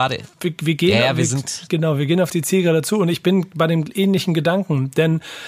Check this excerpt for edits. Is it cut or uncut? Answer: uncut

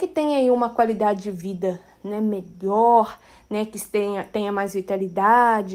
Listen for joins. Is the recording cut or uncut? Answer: uncut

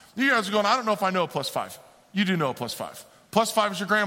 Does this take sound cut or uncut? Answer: uncut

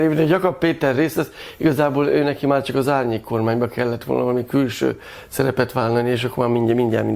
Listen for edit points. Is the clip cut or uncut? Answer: uncut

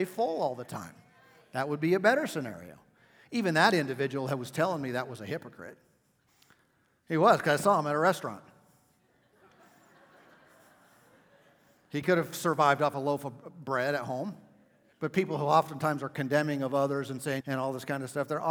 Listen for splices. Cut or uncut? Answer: cut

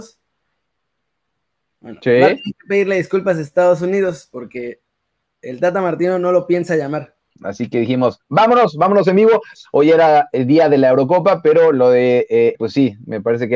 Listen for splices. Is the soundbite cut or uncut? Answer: cut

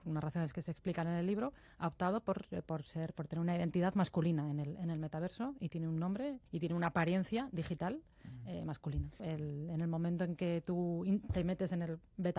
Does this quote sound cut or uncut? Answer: cut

